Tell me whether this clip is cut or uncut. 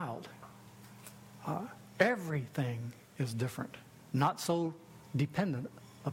uncut